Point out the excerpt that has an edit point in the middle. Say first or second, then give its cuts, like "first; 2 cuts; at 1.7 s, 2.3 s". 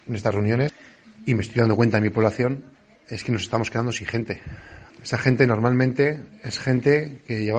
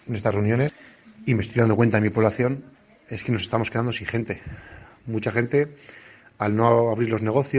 first; 1 cut; at 4.9 s